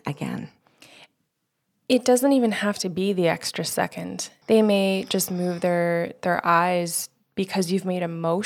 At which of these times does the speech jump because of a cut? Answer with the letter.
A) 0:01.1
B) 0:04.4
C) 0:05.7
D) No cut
B